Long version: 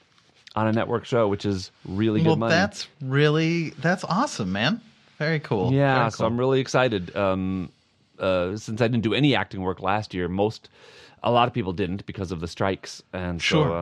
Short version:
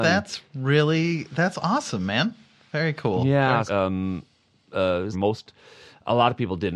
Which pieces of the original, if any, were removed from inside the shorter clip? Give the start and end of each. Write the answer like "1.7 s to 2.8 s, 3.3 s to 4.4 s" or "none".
6.1 s to 7.1 s, 8.6 s to 10.3 s